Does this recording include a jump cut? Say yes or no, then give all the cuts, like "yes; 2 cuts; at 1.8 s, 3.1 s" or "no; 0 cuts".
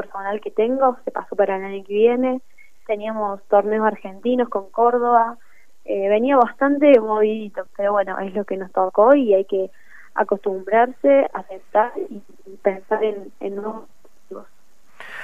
yes; 1 cut; at 7.7 s